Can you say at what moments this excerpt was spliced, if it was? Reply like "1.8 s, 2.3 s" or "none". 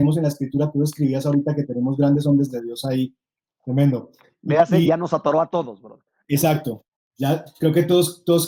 3.5 s

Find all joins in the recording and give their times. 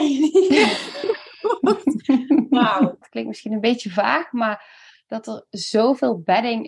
3.0 s

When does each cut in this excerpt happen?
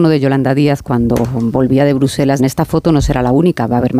2.4 s

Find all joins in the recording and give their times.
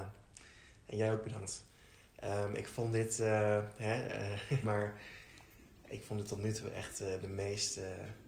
4.6 s

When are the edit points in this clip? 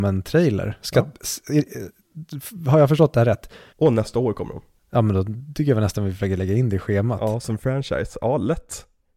3.7 s

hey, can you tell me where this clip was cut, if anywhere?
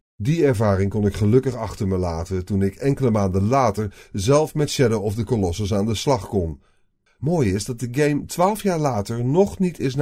7.1 s

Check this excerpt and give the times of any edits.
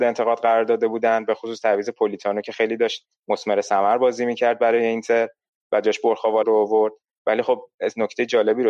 6.4 s

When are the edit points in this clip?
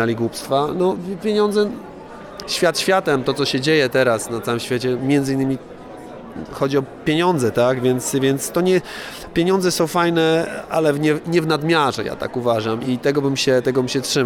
12.8 s

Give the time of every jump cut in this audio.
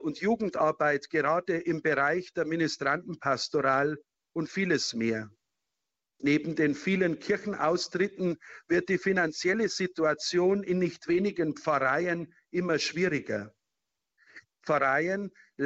6.1 s, 14.4 s

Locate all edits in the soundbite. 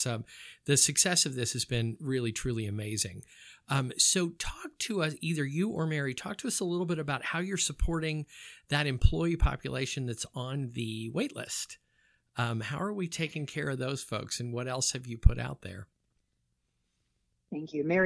none

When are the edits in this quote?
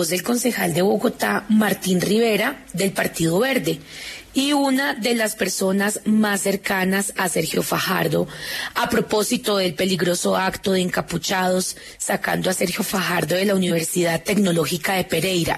none

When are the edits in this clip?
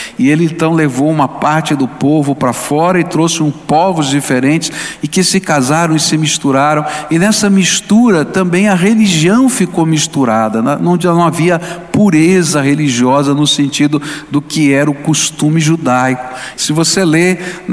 16.5 s

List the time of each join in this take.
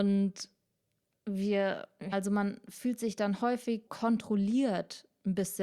2.1 s, 3.9 s

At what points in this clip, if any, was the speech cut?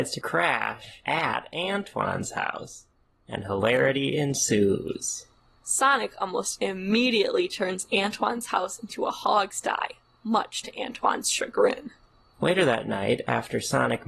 none

